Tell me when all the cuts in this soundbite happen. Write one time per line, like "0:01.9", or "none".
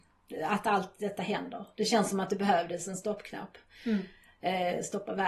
none